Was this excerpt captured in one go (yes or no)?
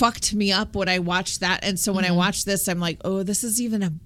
yes